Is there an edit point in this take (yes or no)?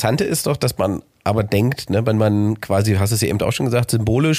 no